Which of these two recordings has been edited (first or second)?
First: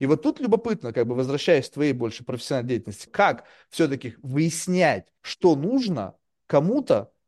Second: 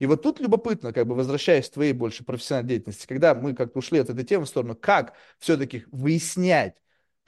first